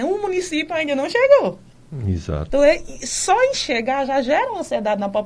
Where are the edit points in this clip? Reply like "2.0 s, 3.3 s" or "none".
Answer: 2.5 s